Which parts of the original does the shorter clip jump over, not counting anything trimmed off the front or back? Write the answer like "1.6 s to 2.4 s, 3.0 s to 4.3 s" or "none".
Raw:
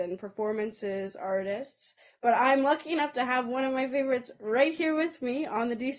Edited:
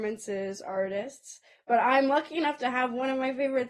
none

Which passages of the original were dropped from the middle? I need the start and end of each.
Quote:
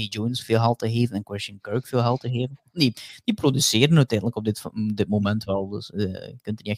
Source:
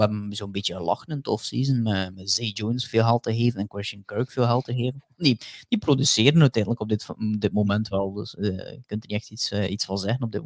none

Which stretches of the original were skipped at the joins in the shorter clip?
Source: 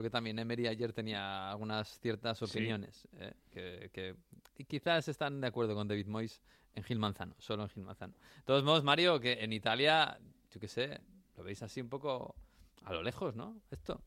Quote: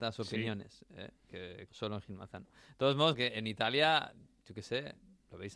3.9 s to 7.3 s, 8.8 s to 9.2 s

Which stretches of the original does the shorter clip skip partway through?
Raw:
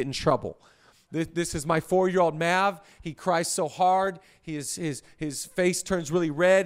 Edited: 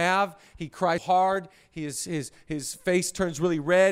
3.4 s to 3.7 s

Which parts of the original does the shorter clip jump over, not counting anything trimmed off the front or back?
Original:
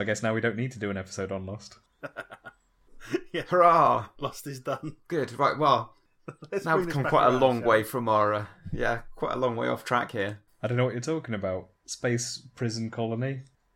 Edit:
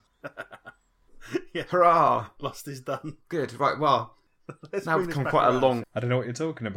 7.6 s to 10.5 s

